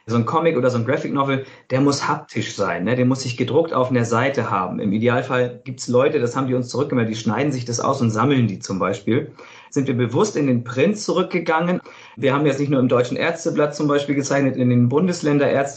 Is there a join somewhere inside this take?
no; 0 cuts

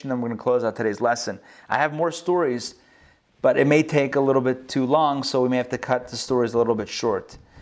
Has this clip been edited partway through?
no; 0 cuts

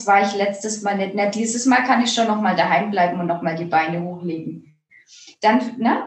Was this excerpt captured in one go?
yes; 0 cuts

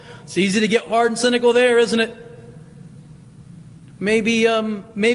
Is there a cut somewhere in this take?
no; 0 cuts

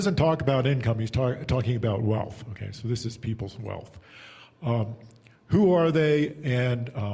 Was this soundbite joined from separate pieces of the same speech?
no; 0 cuts

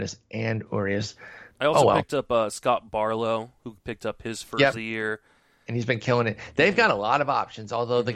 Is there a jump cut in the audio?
yes; 1 cut; at 4.7 s

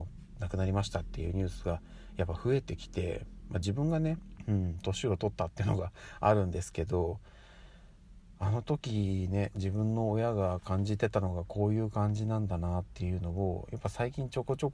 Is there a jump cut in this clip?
no; 0 cuts

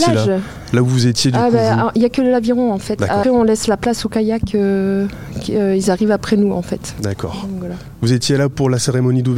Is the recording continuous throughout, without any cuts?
no; 1 cut; at 3.2 s

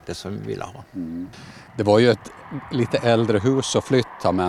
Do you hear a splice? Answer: yes; 1 cut; at 1.7 s

